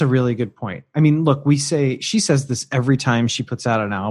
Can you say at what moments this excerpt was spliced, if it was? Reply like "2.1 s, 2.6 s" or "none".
none

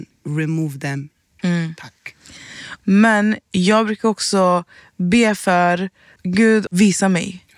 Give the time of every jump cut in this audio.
1.4 s, 2.8 s, 6.7 s

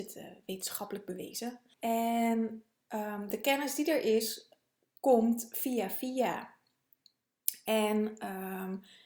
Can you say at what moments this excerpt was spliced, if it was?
1.7 s

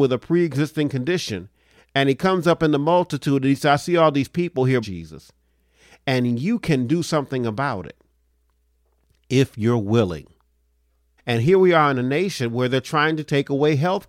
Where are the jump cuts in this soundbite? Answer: 4.8 s, 11.2 s

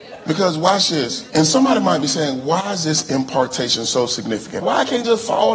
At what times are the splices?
1.3 s, 4.6 s

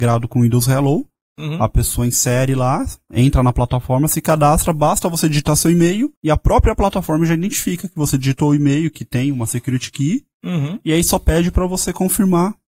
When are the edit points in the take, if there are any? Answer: 6.2 s

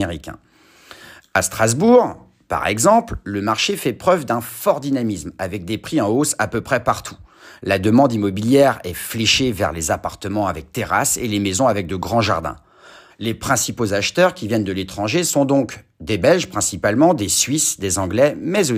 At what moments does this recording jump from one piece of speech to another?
13.1 s

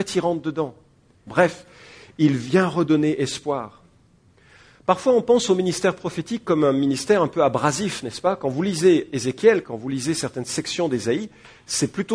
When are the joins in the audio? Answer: 1.3 s, 9.6 s

